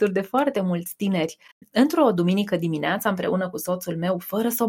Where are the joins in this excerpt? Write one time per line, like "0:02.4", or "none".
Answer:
none